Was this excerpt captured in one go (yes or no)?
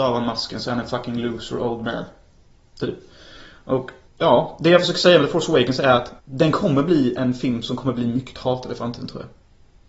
no